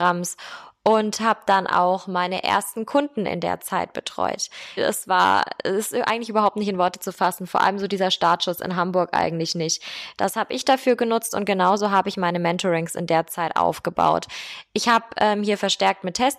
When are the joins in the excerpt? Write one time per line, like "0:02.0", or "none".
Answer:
0:04.8
0:10.2

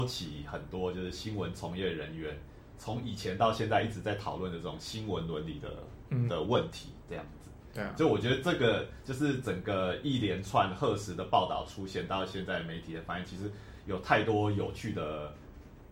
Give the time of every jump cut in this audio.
0:06.3

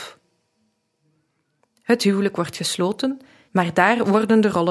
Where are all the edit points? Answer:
0:01.6
0:03.5

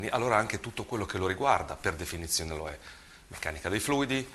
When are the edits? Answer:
none

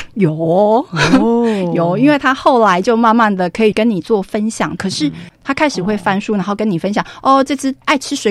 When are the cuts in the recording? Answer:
0:04.8

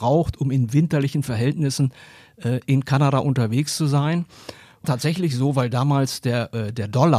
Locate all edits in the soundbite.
0:04.8

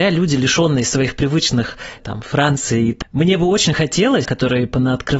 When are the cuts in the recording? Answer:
0:03.0
0:04.2

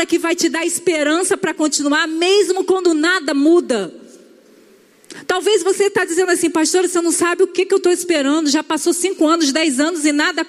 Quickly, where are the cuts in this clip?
none

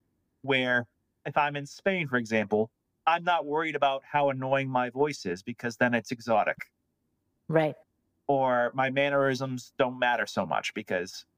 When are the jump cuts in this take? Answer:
none

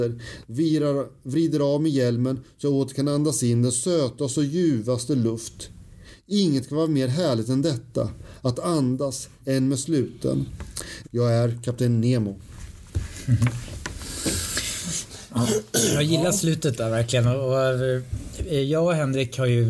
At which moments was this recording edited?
0:09.4
0:11.0

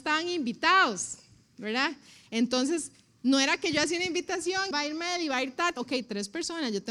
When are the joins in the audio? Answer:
0:04.7
0:05.8

